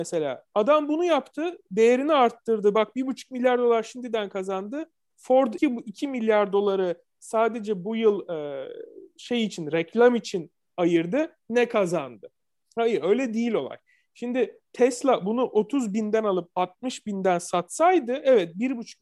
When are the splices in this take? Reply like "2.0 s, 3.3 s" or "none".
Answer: 5.6 s, 14.6 s